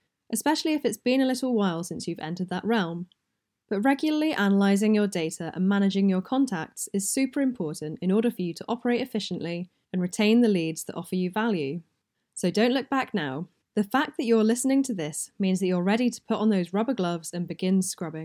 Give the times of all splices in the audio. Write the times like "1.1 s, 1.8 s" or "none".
none